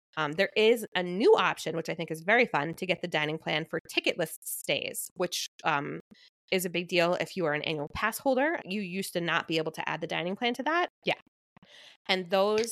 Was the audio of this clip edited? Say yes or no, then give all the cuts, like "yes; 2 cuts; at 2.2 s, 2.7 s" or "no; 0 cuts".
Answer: yes; 2 cuts; at 8.6 s, 11.0 s